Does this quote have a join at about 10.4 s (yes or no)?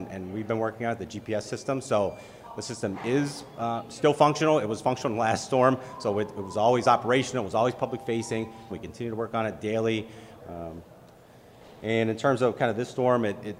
yes